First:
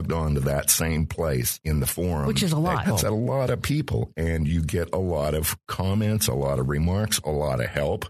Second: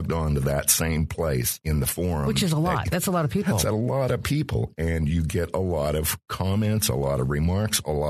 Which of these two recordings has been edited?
first; 1 cut; at 2.8 s

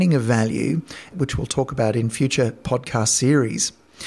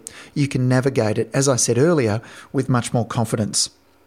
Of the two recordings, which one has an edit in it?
first; 1 cut; at 1.1 s

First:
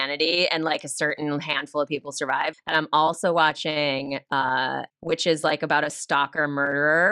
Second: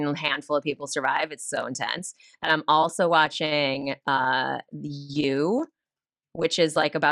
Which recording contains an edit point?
first; 2 cuts; at 2.5 s, 4.9 s

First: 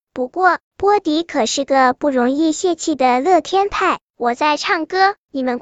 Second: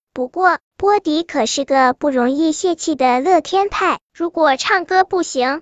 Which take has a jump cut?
first; 1 cut; at 4.1 s

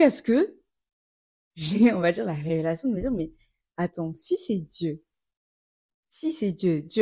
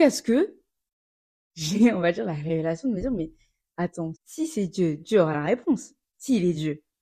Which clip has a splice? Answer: second; 1 cut; at 4.1 s

